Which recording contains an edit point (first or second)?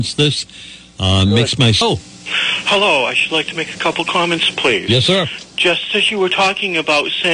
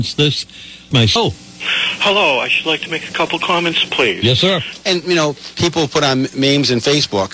second